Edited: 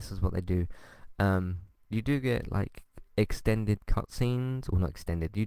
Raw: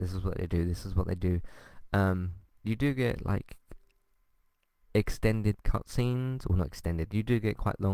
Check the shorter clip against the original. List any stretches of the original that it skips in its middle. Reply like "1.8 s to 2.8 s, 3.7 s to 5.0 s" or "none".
3.8 s to 4.8 s